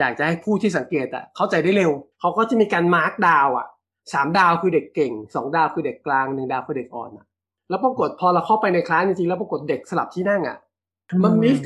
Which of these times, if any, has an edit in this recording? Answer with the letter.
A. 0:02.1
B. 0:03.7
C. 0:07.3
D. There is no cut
A